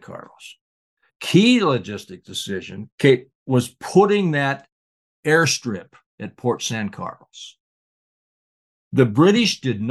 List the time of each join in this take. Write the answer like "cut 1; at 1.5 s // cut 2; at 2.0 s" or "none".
cut 1; at 1.1 s // cut 2; at 2.9 s